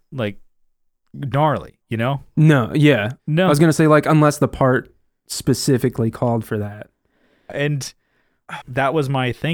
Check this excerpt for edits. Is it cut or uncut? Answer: cut